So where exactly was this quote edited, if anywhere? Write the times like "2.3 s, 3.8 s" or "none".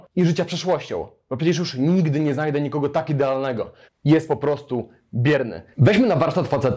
3.9 s, 5.7 s

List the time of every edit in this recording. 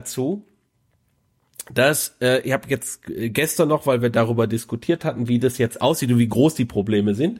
none

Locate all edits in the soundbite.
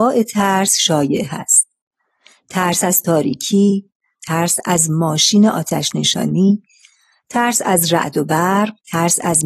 4.2 s

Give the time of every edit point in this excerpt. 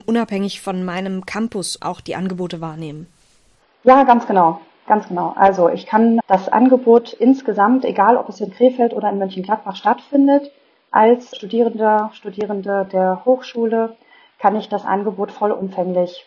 6.2 s

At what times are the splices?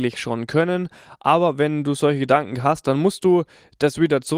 none

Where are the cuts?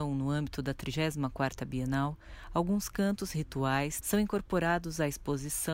4.0 s

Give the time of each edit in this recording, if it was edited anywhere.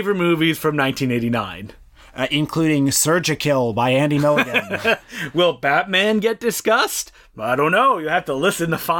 none

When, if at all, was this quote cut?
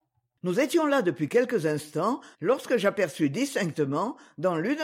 2.3 s

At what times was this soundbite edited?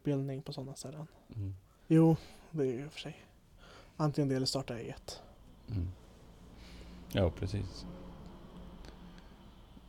1.8 s

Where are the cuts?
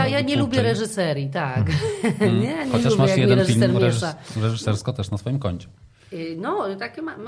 none

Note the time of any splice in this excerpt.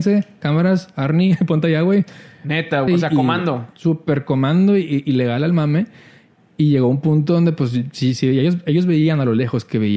2.9 s

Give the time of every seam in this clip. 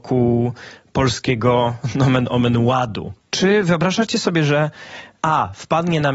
3.2 s

